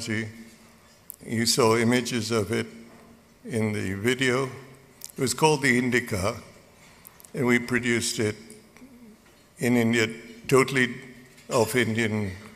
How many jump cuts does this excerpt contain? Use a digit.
1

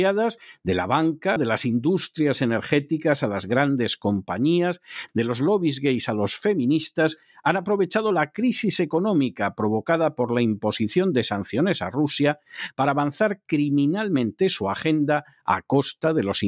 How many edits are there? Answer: 2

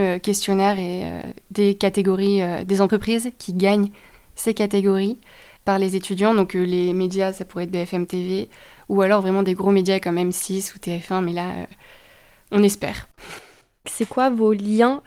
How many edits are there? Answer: 1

